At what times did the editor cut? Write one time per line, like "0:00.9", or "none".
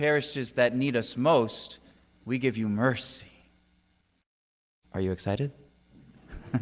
none